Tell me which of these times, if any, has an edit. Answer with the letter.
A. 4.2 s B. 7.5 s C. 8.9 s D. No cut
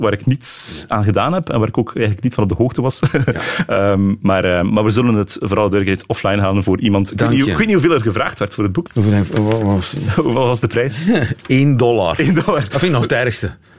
C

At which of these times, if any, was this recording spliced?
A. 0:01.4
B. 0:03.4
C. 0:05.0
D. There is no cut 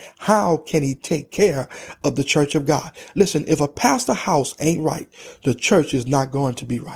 D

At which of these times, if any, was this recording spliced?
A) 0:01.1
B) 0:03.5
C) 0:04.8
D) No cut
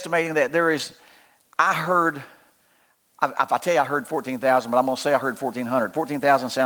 D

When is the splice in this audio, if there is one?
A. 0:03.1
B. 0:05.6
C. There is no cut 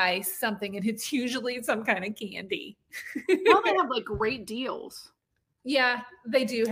C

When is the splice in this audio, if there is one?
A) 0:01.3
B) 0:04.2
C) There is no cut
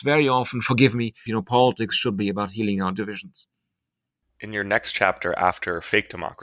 A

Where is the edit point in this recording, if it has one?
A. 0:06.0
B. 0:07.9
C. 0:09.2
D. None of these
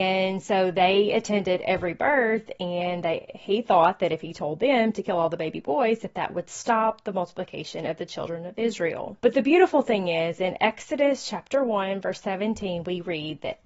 C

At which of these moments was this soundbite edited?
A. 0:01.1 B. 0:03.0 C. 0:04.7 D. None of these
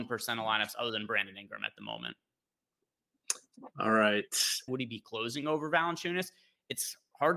C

